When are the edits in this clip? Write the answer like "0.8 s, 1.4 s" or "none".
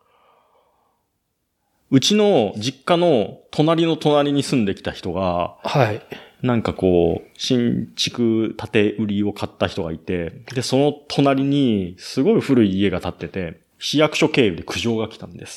13.7 s